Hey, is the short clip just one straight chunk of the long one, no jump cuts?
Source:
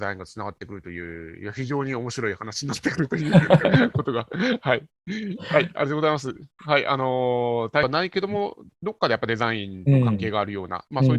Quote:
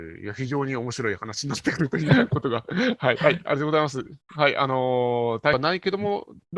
no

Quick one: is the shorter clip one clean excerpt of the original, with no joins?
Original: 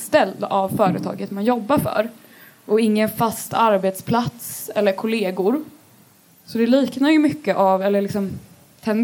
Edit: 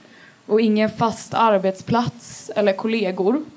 yes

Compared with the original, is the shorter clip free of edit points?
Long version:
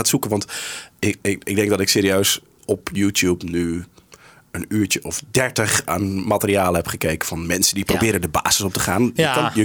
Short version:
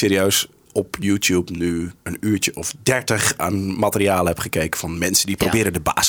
no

